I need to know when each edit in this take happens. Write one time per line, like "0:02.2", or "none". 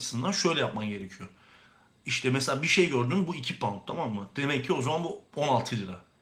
none